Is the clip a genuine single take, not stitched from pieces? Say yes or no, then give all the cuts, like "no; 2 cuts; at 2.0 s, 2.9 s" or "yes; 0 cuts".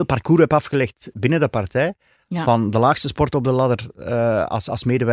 yes; 0 cuts